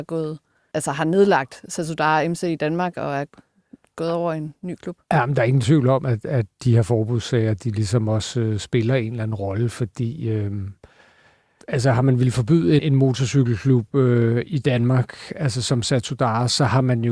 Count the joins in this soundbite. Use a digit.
1